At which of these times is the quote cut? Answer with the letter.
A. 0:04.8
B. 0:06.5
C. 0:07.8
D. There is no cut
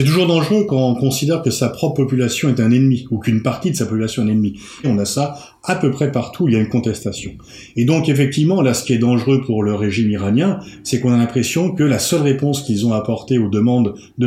A